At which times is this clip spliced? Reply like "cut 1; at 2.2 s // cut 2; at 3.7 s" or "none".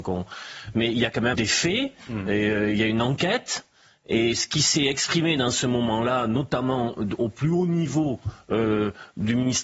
cut 1; at 1.3 s